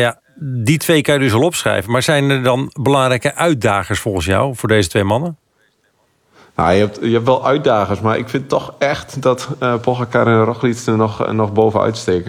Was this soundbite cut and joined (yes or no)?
no